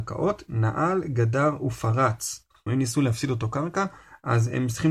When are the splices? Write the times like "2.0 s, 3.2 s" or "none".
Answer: 2.7 s